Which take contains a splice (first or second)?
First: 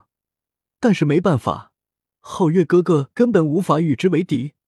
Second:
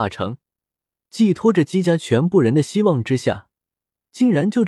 first